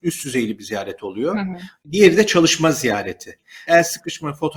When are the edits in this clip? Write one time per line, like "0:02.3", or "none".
0:03.7